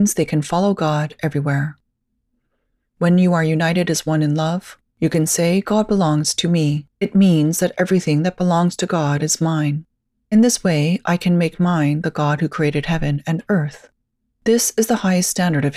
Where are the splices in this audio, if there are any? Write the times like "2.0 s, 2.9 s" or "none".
6.9 s